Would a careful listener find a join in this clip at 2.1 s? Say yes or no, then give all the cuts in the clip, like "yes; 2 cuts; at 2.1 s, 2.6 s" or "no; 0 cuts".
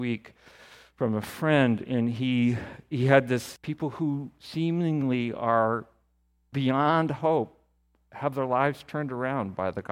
no; 1 cut; at 3.6 s